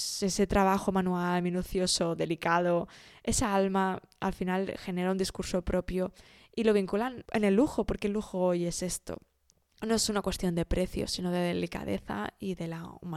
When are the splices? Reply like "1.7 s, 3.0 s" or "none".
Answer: none

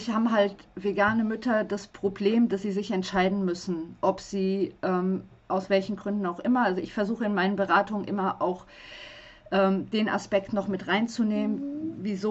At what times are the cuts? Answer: 5.3 s

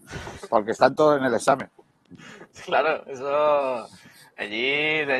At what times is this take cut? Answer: none

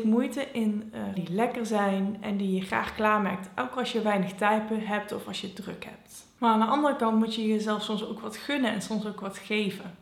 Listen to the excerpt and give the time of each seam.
1.2 s

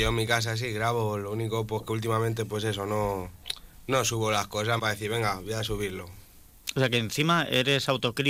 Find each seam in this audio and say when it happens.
4.8 s

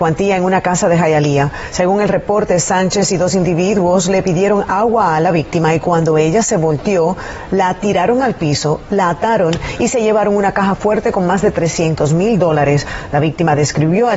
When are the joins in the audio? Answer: none

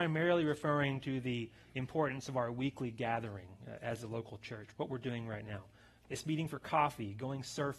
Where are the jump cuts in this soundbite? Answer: 6.0 s

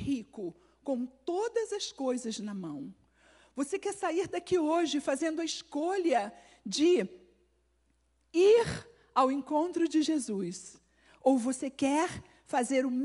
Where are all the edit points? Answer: none

